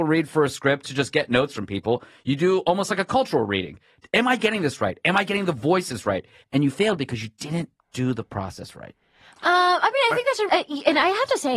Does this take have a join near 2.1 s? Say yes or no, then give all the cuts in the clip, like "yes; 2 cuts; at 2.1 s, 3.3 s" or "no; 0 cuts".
no; 2 cuts; at 6.4 s, 10.5 s